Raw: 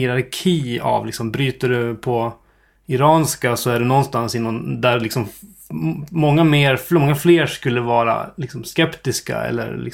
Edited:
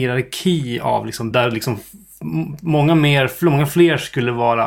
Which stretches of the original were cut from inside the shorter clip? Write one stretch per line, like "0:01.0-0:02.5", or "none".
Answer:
0:01.3-0:04.8